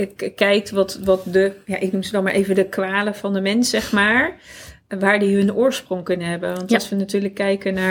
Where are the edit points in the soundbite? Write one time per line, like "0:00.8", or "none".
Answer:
none